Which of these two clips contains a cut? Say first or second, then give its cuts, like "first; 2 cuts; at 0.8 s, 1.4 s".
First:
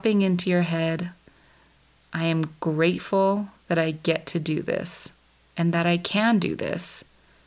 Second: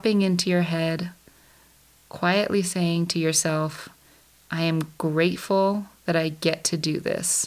first; 1 cut; at 2.0 s